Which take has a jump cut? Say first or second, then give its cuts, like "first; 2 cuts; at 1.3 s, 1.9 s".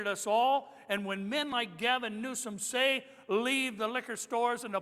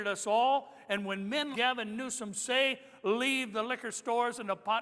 second; 1 cut; at 1.5 s